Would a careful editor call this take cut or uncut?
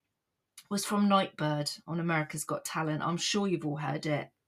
uncut